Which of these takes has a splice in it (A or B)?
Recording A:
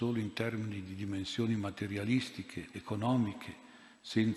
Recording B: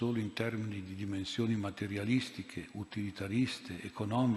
A